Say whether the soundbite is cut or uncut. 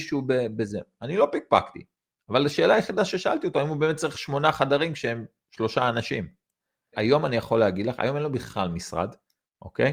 cut